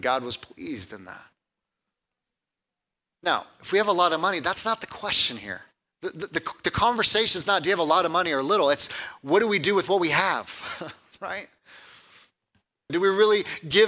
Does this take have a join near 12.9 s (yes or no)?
yes